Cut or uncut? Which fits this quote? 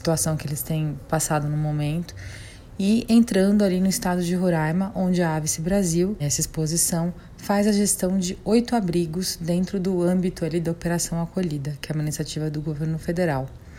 cut